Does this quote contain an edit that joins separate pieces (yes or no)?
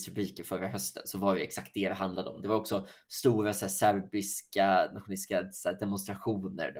no